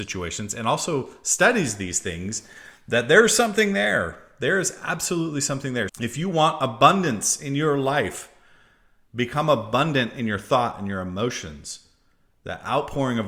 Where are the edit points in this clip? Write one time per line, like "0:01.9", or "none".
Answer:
0:05.9